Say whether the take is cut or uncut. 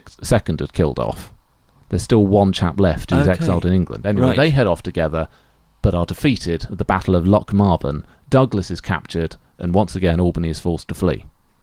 uncut